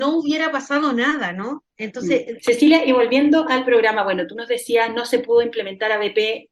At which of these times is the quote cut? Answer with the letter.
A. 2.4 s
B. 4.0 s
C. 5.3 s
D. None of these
A